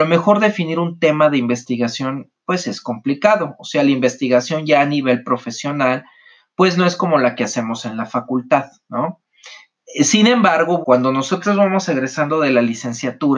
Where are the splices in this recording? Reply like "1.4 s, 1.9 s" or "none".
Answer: 9.8 s, 10.8 s